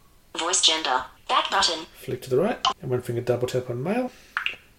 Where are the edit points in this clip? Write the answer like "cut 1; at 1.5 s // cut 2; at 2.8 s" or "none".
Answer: cut 1; at 1.2 s // cut 2; at 2.7 s